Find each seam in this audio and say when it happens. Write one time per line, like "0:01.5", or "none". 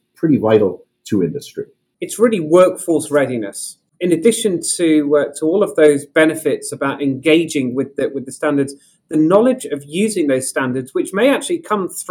0:01.9